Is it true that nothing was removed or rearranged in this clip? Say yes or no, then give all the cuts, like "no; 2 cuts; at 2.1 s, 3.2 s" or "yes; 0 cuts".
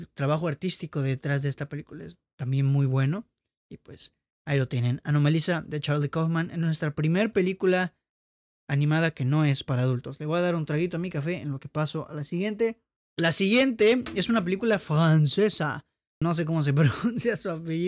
no; 2 cuts; at 13.0 s, 16.2 s